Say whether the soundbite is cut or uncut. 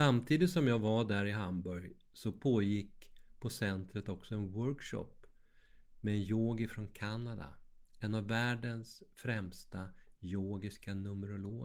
uncut